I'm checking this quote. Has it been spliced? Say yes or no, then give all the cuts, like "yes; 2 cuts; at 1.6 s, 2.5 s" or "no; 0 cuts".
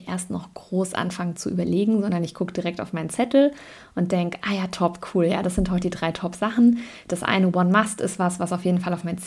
no; 0 cuts